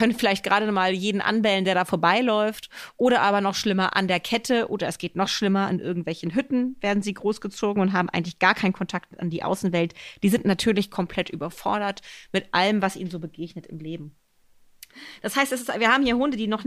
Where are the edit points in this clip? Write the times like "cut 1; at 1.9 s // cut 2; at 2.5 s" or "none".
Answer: none